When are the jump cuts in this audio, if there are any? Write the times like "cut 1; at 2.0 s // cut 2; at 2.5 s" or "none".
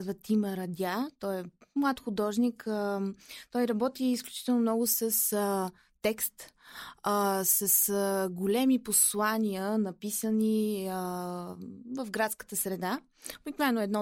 none